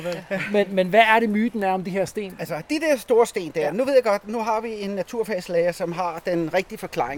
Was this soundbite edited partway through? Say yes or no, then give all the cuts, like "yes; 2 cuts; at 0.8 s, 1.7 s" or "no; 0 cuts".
yes; 1 cut; at 2.4 s